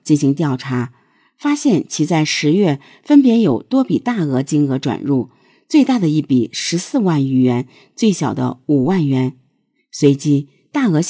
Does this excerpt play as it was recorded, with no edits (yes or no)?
yes